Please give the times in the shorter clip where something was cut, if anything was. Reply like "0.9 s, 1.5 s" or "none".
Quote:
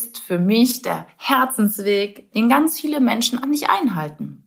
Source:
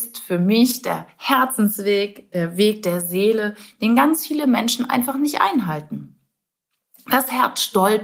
2.3 s, 3.4 s